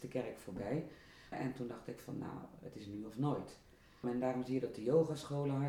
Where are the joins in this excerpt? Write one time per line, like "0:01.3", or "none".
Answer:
0:01.3
0:04.0